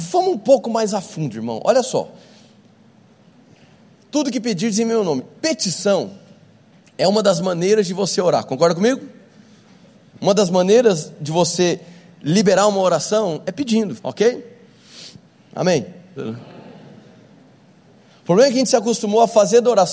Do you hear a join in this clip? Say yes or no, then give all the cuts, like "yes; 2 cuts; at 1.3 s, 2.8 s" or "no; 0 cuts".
yes; 2 cuts; at 14.0 s, 16.2 s